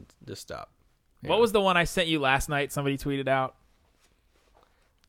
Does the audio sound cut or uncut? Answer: uncut